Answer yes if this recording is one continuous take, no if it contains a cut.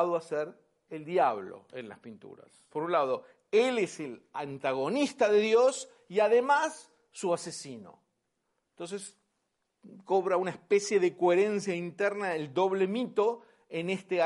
no